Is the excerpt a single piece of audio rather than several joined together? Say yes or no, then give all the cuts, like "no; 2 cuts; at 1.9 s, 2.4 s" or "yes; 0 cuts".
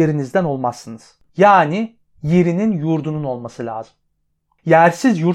no; 1 cut; at 1.3 s